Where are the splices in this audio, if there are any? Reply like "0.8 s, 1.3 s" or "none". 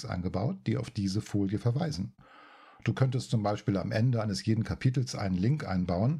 none